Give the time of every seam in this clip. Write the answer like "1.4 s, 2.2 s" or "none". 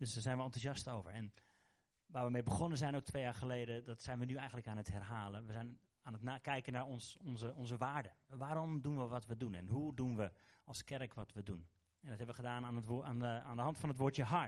none